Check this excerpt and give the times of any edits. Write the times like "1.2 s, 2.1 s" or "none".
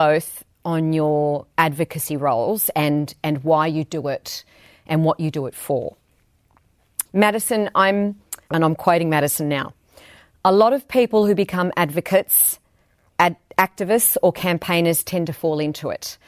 7.1 s, 8.5 s